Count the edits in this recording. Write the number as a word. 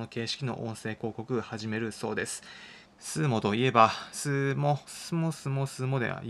two